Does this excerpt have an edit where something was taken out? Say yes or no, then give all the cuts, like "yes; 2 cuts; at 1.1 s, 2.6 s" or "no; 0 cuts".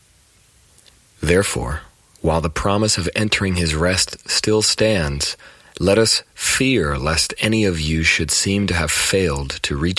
no; 0 cuts